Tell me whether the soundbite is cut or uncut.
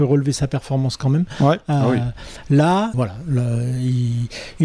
cut